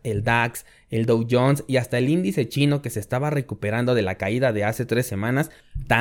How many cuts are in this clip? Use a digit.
0